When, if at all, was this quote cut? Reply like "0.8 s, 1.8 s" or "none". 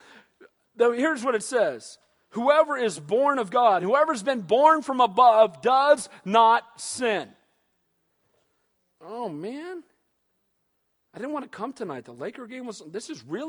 3.8 s